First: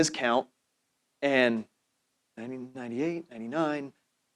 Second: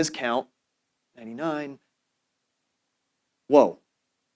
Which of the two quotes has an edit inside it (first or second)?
second